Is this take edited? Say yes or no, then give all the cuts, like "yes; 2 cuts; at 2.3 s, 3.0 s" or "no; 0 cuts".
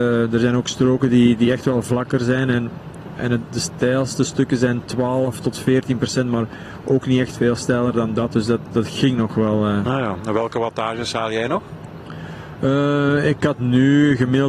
no; 0 cuts